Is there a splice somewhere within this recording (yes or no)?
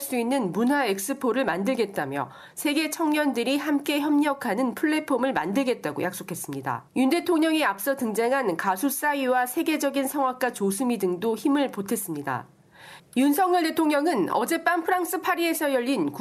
yes